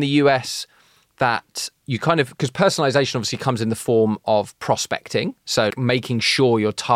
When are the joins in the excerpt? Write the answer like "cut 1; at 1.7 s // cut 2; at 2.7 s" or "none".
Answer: cut 1; at 5.7 s